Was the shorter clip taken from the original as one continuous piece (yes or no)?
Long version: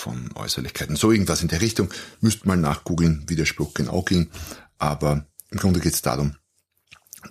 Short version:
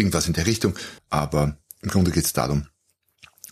no